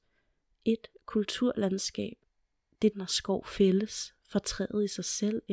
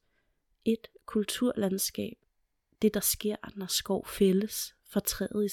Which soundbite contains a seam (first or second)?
first